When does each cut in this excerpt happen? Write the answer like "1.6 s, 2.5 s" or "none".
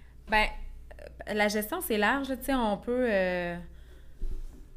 none